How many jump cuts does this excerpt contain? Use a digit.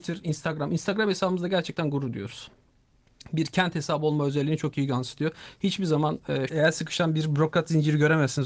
1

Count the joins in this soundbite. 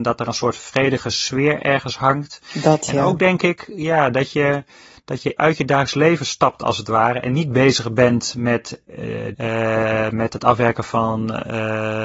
2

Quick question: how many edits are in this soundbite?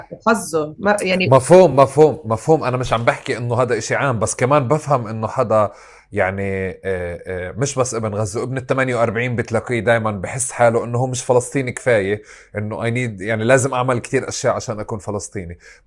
0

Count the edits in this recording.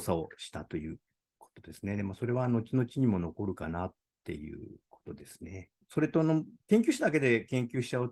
0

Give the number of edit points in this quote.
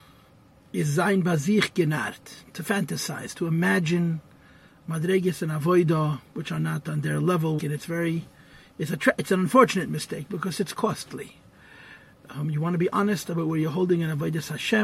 1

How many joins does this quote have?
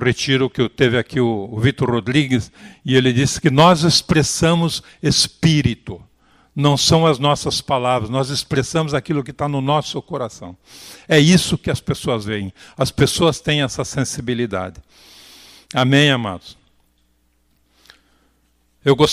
0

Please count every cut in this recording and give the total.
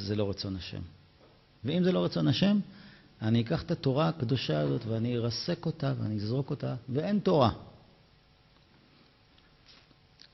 2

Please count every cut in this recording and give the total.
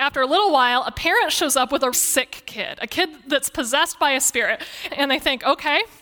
2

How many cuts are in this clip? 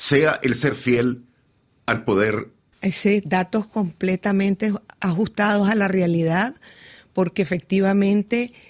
1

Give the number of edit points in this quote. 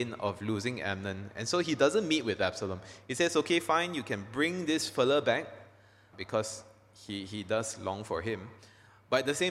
1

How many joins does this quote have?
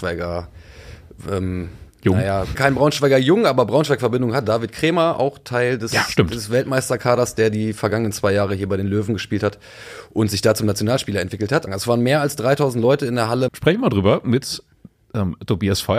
3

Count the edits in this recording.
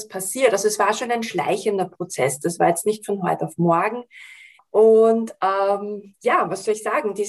1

